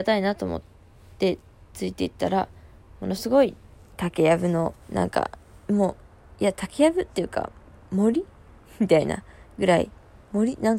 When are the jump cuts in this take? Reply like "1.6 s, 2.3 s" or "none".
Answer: 4.8 s